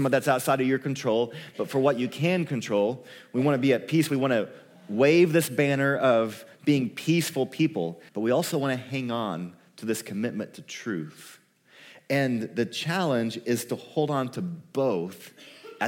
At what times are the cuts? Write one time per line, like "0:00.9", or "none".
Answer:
0:08.1